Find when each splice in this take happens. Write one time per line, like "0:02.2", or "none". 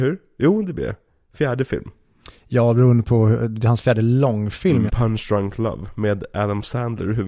0:04.9